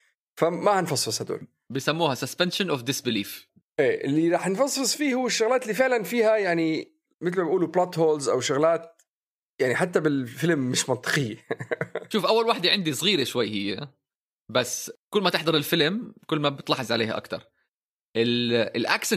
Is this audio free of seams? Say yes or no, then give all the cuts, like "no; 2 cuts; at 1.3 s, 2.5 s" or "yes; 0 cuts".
yes; 0 cuts